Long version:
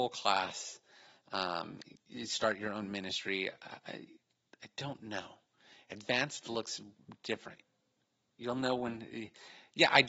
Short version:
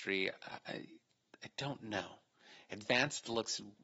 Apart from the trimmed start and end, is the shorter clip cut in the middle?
no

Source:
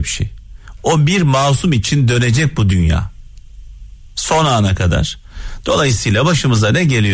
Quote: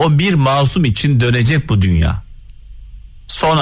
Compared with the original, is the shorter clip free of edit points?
yes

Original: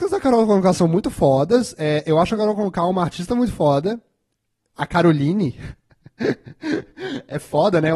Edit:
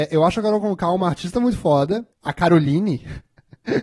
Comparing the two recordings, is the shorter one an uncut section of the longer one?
no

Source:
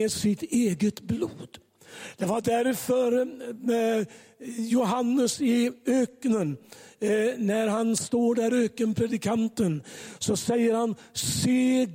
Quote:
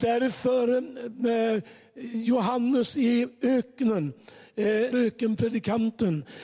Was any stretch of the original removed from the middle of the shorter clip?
yes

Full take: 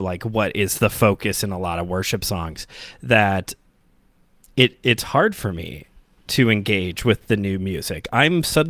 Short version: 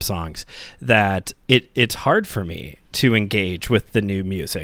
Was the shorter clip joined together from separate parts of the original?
yes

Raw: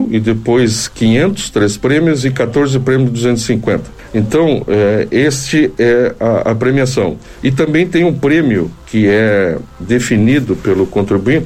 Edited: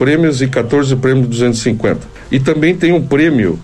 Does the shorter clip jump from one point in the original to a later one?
yes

